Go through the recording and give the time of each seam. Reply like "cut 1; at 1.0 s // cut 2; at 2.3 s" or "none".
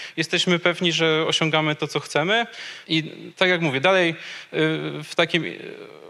cut 1; at 2.9 s